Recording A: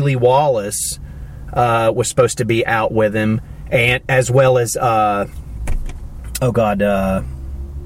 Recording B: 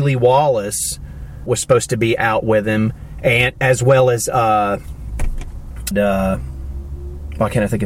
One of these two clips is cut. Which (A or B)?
B